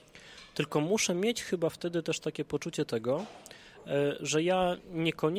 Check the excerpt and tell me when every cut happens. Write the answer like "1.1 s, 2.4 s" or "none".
none